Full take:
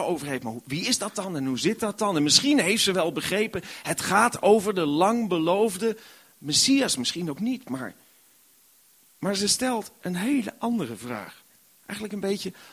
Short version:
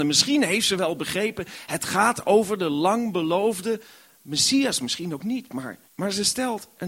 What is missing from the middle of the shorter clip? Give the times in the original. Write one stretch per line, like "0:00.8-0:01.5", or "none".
0:08.0-0:09.1